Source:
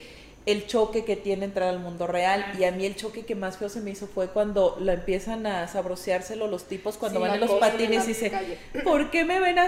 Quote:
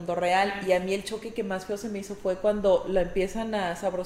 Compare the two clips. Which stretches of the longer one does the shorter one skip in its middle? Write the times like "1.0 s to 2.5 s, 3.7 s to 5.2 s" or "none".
none